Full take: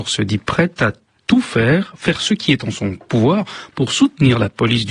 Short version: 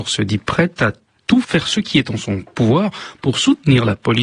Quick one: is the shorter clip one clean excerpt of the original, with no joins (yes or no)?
no